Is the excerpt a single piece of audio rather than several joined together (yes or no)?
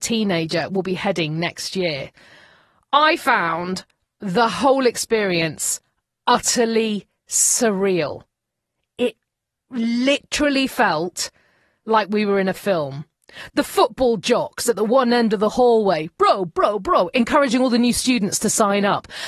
no